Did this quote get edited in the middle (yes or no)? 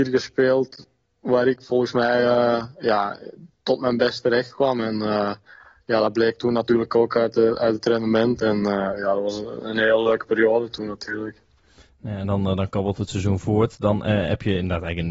no